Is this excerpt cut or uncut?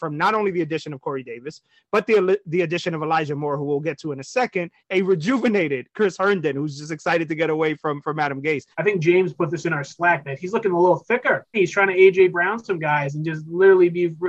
cut